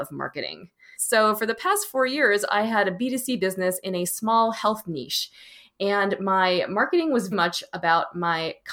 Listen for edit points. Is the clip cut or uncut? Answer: cut